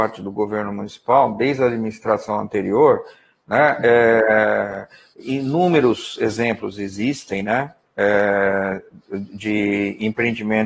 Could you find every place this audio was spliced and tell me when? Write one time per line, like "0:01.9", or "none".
none